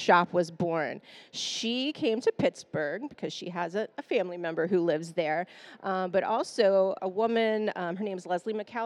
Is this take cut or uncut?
cut